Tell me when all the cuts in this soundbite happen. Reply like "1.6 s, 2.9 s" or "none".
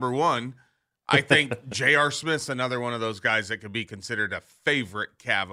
none